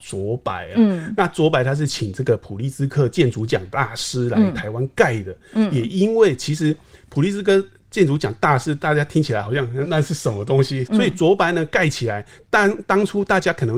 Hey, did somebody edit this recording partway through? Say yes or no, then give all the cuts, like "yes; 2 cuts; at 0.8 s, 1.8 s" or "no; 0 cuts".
yes; 2 cuts; at 9.8 s, 10.8 s